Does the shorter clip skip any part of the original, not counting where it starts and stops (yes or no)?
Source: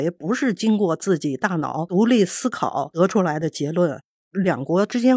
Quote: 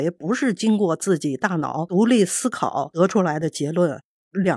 no